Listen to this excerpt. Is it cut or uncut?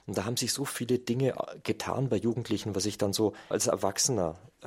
cut